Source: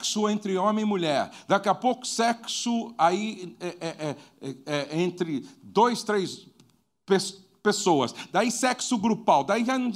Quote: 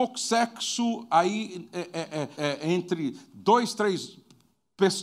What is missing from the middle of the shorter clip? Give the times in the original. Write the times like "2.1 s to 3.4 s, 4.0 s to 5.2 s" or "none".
4.2 s to 4.6 s